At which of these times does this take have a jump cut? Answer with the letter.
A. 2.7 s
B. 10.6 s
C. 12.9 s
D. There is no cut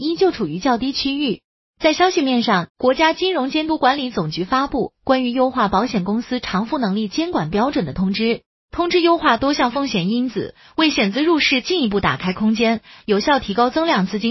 A